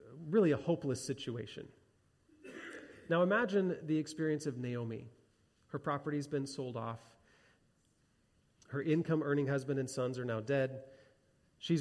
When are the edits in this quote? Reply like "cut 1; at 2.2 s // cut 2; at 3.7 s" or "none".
none